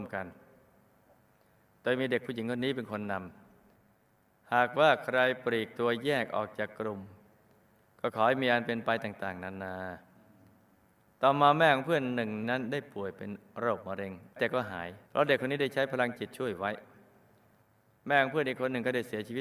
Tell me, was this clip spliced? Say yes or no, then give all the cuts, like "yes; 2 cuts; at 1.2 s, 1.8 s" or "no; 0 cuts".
yes; 2 cuts; at 12.4 s, 15.1 s